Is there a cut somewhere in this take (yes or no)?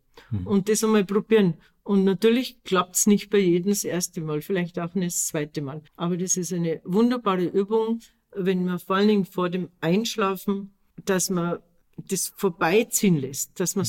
yes